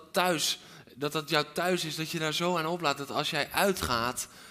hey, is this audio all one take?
yes; 0 cuts

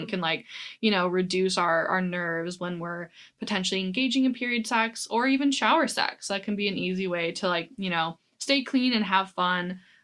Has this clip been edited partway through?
no; 0 cuts

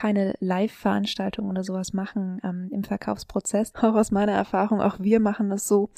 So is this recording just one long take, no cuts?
no; 1 cut; at 3.7 s

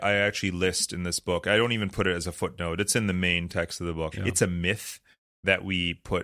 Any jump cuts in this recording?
yes; 1 cut; at 4.1 s

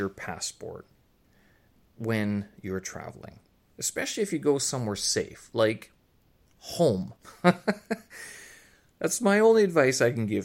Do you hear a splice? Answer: yes; 1 cut; at 7.2 s

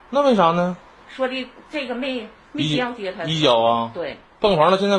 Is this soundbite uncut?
yes; 0 cuts

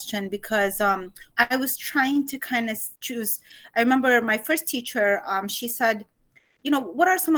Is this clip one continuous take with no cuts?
no; 2 cuts; at 1.3 s, 3.0 s

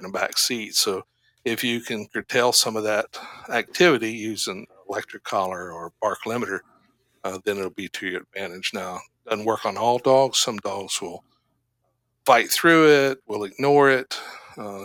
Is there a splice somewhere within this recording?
no; 0 cuts

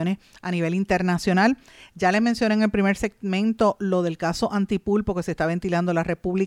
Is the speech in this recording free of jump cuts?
yes; 0 cuts

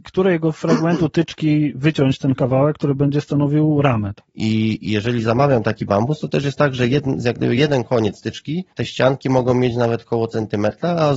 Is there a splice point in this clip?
yes; 2 cuts; at 4.2 s, 8.7 s

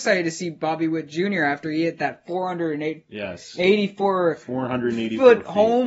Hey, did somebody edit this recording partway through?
no; 0 cuts

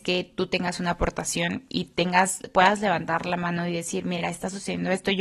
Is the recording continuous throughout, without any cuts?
yes; 0 cuts

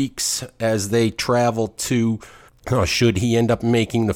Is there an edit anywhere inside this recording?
yes; 1 cut; at 2.5 s

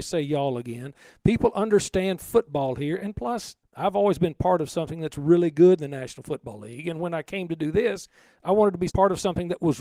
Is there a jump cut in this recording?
no; 0 cuts

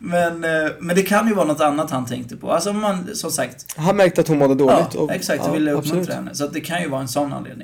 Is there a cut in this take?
no; 0 cuts

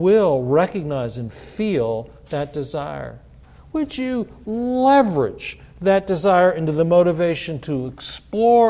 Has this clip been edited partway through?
no; 0 cuts

